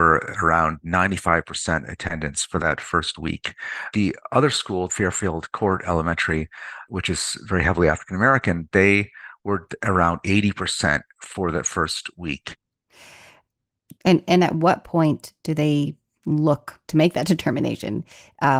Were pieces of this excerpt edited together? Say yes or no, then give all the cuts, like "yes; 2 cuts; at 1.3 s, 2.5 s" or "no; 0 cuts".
yes; 2 cuts; at 14.0 s, 16.8 s